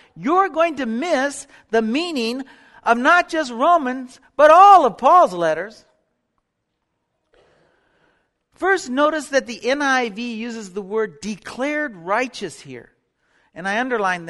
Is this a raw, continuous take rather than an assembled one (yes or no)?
yes